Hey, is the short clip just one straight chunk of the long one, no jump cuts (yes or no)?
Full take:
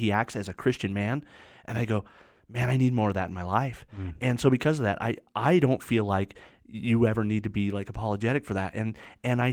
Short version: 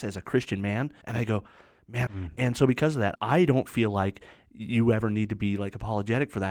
no